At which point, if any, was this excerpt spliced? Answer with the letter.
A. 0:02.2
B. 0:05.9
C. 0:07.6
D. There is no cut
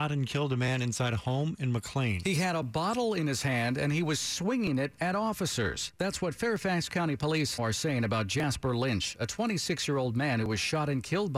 C